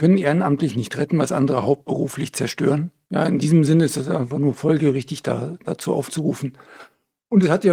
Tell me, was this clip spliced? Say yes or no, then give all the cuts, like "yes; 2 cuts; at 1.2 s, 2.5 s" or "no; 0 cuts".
no; 0 cuts